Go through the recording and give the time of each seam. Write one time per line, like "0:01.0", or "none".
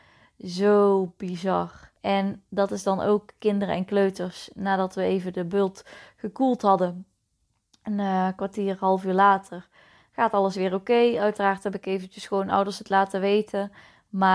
0:02.0